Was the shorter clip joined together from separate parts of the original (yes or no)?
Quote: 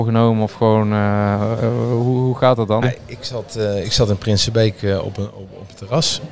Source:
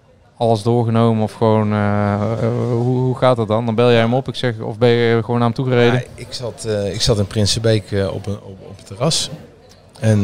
yes